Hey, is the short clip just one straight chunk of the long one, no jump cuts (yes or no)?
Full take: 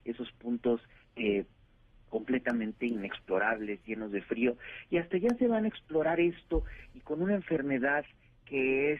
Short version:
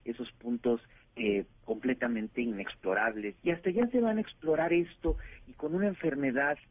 no